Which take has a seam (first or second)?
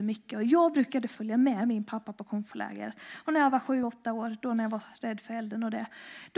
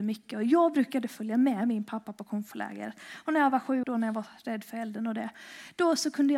second